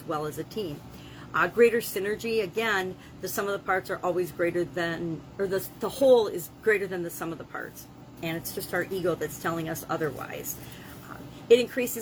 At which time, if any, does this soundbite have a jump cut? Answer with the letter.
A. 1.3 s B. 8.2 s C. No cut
B